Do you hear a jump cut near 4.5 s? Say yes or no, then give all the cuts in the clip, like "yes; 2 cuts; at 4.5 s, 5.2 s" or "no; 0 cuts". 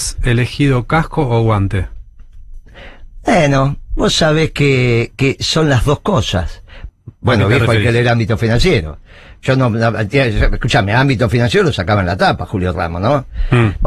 no; 1 cut; at 6.9 s